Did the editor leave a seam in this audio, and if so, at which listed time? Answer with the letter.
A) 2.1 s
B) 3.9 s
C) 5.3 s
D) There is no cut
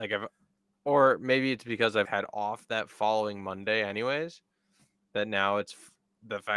A